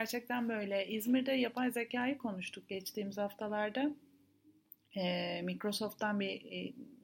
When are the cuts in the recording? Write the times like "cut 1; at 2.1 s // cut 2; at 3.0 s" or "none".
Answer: none